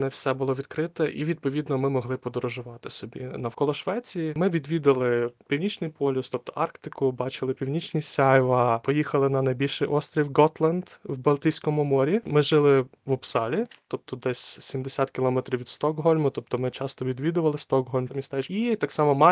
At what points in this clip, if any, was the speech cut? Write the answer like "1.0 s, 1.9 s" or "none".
18.1 s

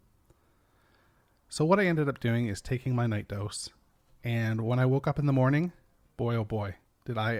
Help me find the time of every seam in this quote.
none

